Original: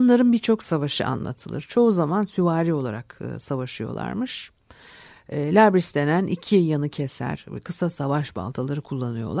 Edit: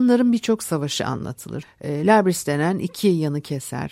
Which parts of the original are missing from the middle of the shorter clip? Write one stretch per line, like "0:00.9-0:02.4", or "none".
0:01.6-0:05.1